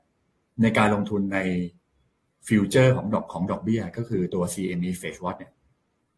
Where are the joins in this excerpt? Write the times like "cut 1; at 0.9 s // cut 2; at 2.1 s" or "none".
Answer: none